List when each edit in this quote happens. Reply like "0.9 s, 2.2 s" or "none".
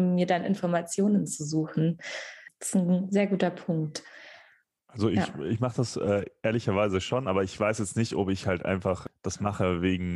none

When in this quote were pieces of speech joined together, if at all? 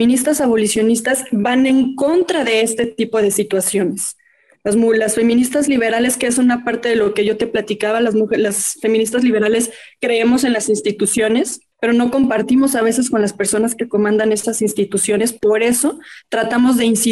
11.7 s

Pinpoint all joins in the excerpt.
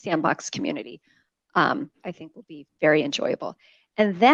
none

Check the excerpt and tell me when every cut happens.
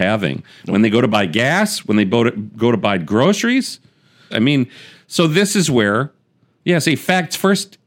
4.3 s

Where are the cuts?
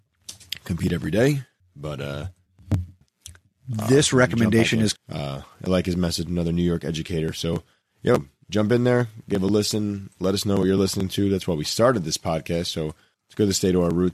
5.0 s

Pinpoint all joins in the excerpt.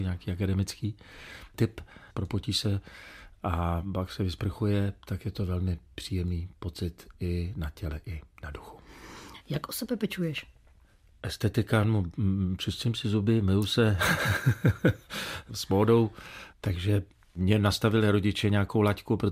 2.1 s, 9.4 s, 16.5 s

